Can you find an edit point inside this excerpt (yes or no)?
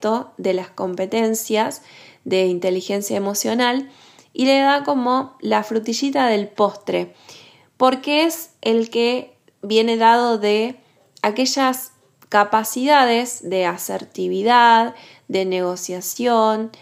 no